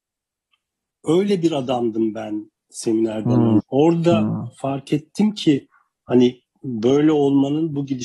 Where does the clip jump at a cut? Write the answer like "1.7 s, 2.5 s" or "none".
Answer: 3.6 s